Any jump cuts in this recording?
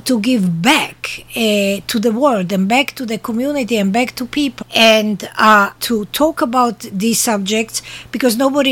yes; 2 cuts; at 4.6 s, 5.8 s

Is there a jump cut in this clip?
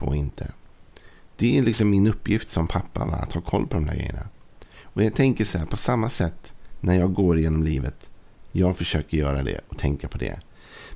yes; 1 cut; at 8.5 s

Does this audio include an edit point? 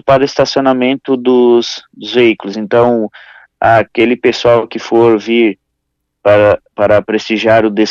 no; 0 cuts

